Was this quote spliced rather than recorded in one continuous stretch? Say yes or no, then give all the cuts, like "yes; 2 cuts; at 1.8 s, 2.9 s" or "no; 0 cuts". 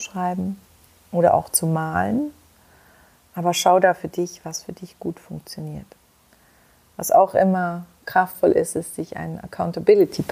no; 0 cuts